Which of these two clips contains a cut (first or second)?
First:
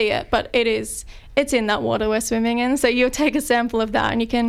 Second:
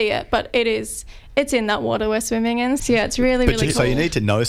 second